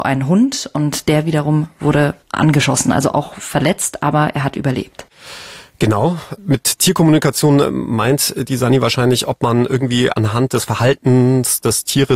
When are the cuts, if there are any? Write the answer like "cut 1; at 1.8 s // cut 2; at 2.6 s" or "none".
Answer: none